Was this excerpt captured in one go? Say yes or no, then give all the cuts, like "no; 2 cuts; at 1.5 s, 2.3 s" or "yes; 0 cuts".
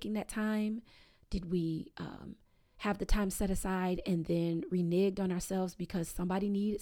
yes; 0 cuts